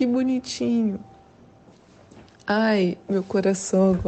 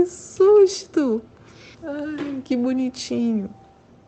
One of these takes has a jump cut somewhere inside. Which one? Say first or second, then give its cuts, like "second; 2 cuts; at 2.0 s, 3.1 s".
second; 1 cut; at 1.7 s